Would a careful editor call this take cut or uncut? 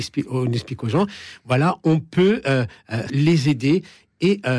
cut